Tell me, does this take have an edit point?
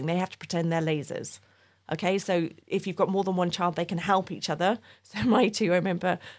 yes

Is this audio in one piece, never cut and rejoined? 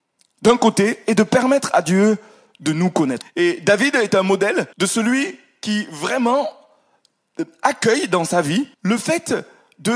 no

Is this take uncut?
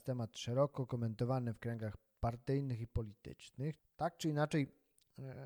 no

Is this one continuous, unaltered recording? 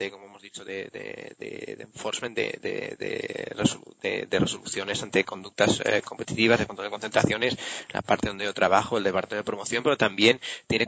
yes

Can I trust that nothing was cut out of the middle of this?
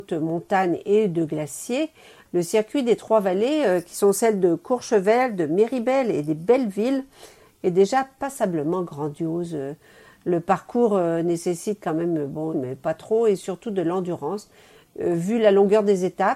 no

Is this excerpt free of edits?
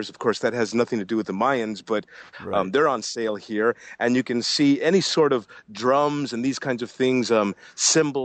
yes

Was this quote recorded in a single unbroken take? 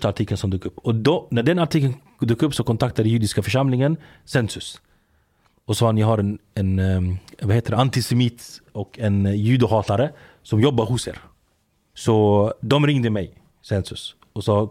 no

